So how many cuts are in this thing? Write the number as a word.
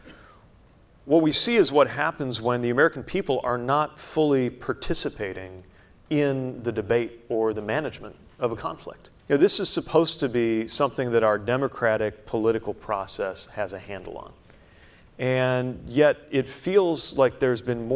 one